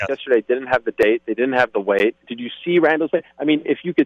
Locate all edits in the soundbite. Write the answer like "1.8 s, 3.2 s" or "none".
2.2 s